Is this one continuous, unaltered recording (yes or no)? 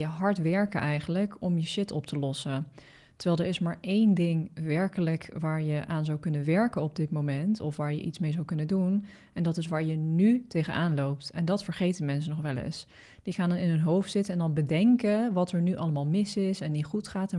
yes